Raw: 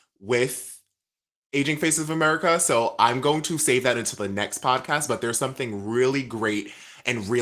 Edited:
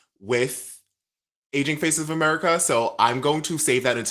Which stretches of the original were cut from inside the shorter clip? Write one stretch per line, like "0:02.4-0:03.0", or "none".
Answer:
none

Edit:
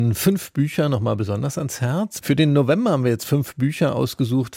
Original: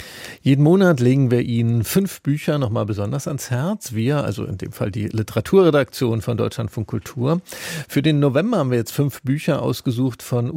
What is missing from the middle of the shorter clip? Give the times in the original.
0:03.9-0:07.9

